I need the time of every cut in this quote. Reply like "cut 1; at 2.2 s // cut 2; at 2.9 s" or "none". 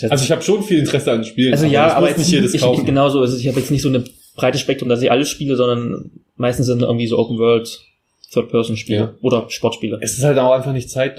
none